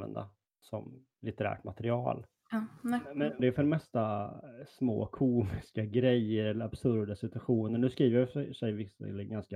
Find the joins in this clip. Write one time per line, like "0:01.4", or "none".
0:03.4